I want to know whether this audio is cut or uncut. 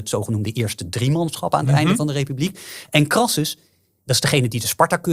uncut